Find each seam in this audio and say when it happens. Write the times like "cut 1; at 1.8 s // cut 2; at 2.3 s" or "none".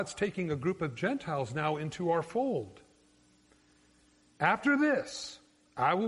cut 1; at 4.4 s